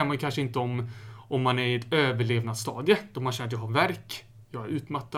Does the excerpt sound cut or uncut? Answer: uncut